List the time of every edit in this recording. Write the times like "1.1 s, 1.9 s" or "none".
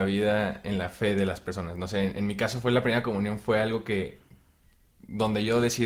none